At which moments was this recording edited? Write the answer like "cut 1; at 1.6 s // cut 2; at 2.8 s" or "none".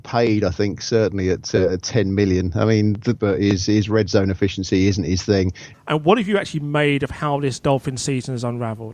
cut 1; at 3.2 s // cut 2; at 5.7 s